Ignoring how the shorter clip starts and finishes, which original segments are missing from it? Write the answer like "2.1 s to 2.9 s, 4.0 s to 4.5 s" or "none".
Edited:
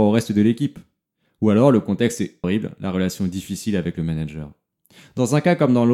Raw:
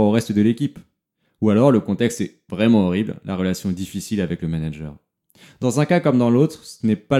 2.4 s to 2.9 s